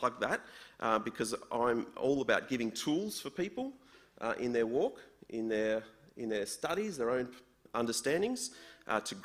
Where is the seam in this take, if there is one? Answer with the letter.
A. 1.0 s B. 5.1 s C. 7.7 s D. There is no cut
C